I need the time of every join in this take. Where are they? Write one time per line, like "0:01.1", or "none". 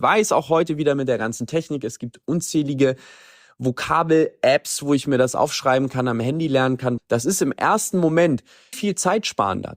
0:07.0
0:08.7